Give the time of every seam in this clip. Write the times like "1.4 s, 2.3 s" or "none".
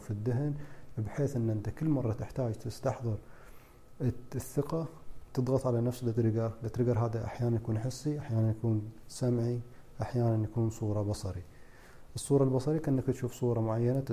none